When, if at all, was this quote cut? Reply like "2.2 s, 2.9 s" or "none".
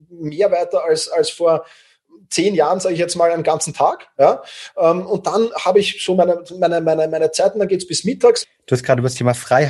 8.4 s